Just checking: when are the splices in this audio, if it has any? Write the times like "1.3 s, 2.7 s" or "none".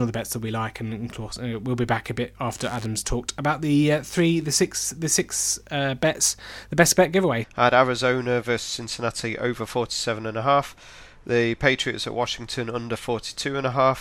7.4 s